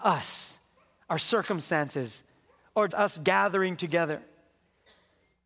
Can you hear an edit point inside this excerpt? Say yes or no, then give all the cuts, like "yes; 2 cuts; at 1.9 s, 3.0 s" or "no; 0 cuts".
yes; 1 cut; at 2.9 s